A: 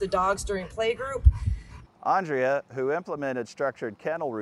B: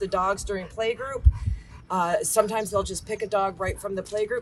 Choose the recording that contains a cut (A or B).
A